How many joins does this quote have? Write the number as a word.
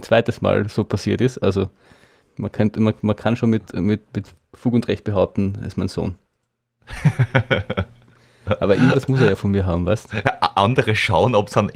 one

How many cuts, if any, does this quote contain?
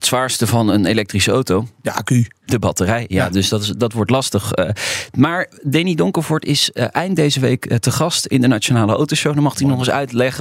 zero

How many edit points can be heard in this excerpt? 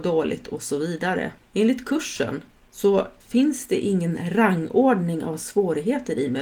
two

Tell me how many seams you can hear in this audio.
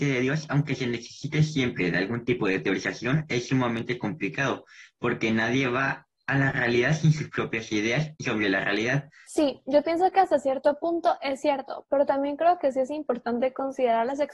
one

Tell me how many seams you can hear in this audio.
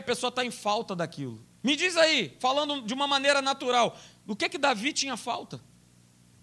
one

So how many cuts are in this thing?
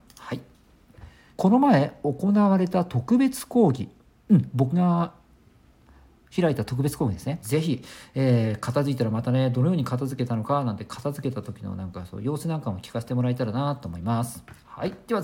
two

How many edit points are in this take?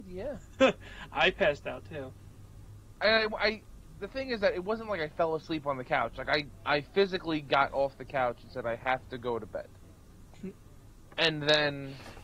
one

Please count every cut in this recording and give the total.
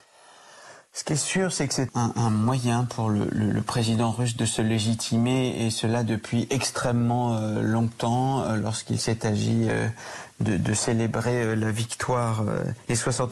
one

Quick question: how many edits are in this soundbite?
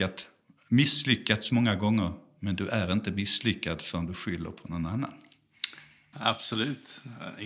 one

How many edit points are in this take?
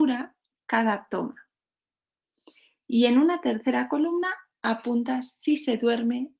zero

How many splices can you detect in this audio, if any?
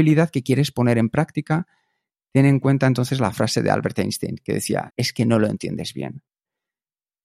one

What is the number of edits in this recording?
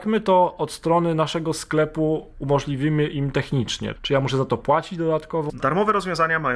two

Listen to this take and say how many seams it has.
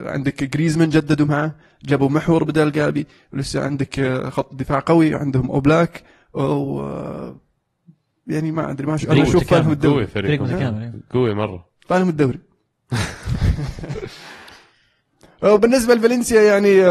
one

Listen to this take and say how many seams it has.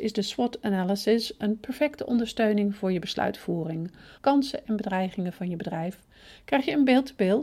one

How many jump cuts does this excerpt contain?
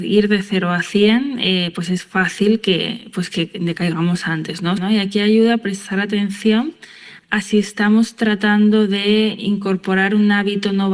one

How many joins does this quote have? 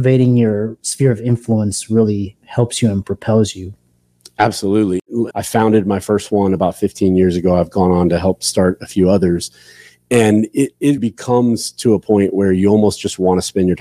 two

